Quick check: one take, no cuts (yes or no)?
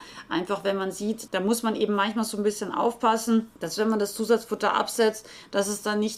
no